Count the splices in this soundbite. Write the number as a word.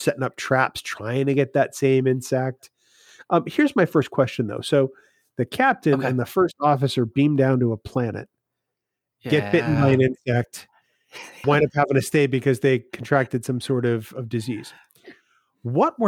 one